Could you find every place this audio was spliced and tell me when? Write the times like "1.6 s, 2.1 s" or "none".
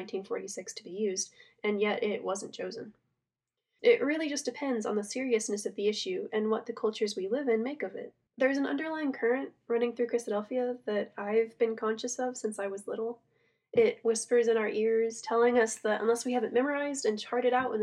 3.8 s, 8.3 s